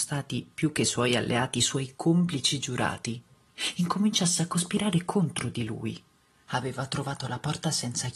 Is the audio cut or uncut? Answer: cut